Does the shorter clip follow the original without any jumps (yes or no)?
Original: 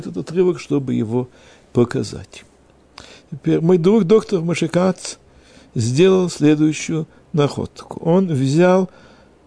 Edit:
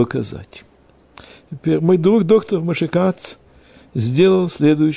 yes